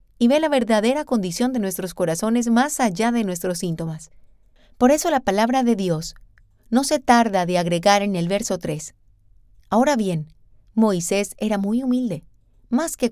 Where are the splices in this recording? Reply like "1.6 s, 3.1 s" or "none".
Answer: none